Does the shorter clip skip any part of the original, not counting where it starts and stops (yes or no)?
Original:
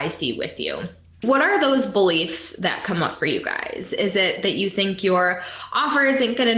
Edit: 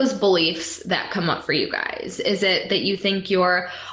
no